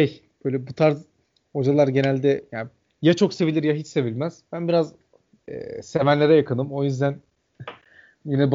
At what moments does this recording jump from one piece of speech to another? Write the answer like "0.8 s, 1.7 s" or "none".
none